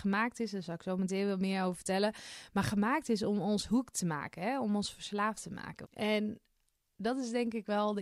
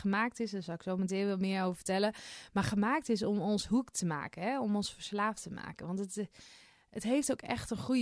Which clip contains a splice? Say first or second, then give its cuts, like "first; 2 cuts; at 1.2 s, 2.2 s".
first; 1 cut; at 5.8 s